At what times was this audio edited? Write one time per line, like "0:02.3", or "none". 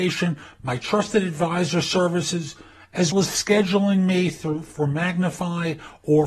0:03.1